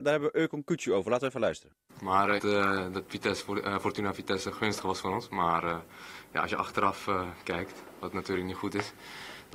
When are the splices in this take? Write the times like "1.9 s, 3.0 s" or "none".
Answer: 2.4 s

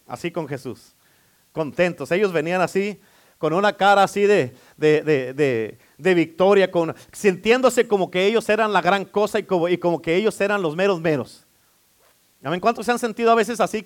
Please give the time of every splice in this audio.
none

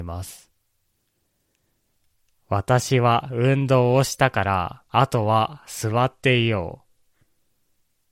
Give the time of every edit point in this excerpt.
4.9 s

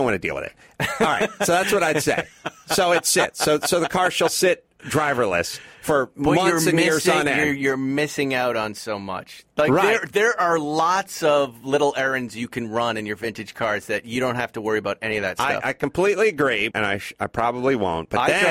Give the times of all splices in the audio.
16.7 s

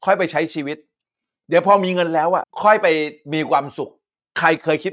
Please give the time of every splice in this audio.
2.4 s

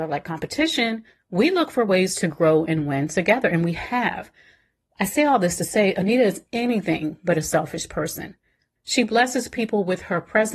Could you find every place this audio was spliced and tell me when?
8.8 s

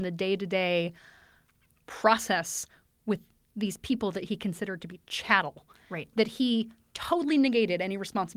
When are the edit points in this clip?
none

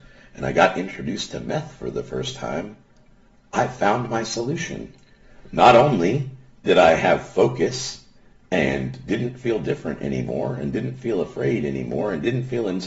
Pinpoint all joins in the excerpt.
none

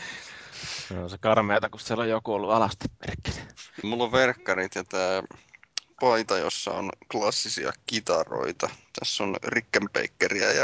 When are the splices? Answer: 3.8 s

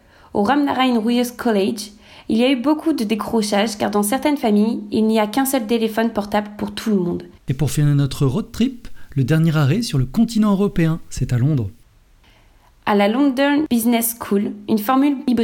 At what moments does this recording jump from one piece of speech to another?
7.4 s

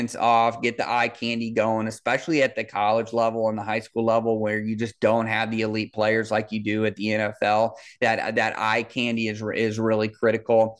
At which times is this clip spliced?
none

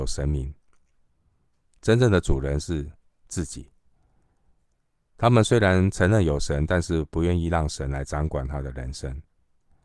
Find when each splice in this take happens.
1.8 s

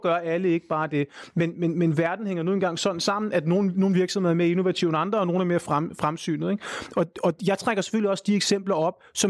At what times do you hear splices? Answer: none

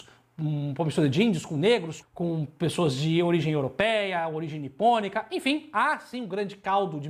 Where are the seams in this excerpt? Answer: 2.0 s

